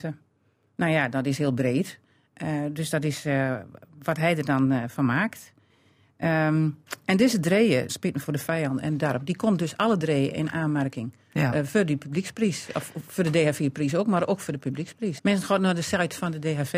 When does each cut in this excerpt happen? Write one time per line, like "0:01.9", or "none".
0:07.9
0:15.2